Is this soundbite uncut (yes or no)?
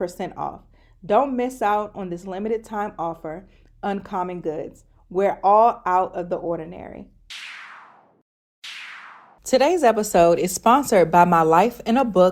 yes